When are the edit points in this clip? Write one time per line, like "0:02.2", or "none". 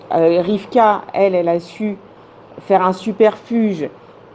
none